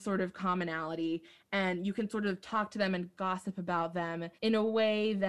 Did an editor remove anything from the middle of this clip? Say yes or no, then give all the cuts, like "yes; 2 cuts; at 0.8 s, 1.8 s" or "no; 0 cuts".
yes; 1 cut; at 4.4 s